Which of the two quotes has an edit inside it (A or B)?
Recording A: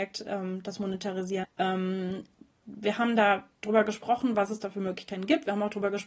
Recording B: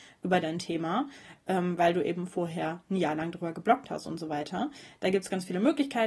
A